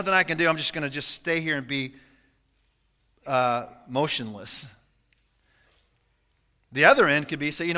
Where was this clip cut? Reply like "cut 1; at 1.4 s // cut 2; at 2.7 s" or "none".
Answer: none